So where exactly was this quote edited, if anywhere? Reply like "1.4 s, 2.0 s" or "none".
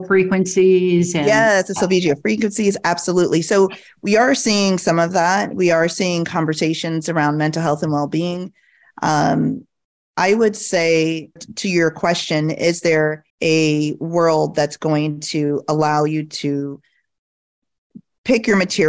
11.4 s, 13.3 s